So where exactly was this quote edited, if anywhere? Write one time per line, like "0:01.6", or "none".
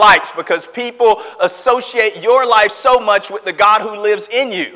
none